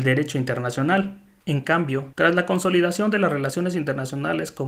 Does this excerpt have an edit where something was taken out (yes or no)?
yes